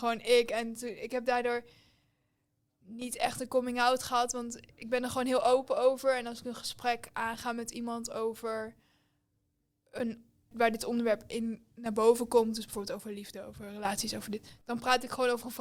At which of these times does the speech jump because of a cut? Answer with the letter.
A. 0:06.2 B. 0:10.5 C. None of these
B